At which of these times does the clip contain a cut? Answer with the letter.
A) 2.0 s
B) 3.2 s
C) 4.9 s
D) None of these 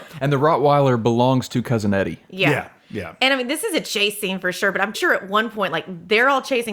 C